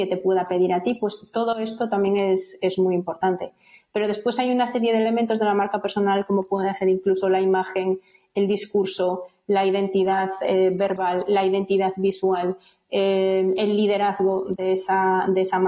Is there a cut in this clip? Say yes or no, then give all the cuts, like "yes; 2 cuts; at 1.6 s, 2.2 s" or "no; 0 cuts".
no; 0 cuts